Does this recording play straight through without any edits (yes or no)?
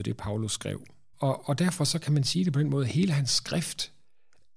no